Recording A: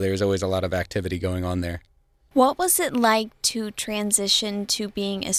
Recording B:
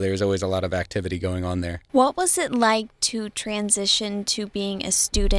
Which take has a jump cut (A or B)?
B